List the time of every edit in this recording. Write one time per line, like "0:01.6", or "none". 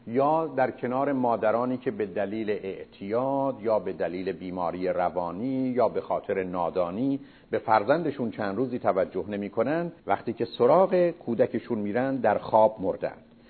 0:10.0